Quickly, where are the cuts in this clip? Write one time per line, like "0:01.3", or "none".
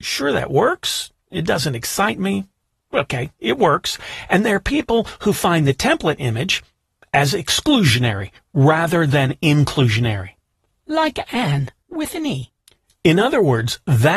none

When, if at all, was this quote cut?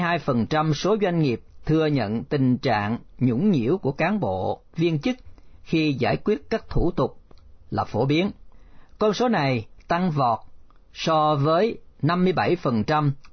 0:04.7

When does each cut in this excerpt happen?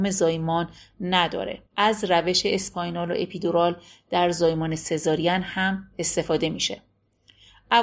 0:01.7

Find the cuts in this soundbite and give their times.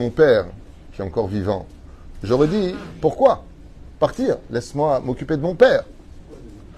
none

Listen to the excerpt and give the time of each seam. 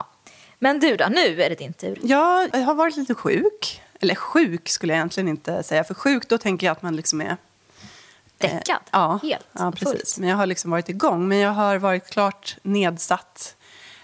0:02.5

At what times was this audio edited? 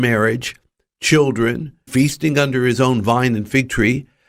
0:01.9

